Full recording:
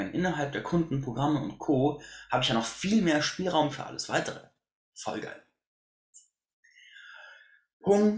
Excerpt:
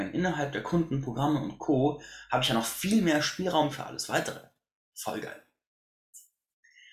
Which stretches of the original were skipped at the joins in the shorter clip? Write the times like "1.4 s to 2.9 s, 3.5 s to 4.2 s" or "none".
none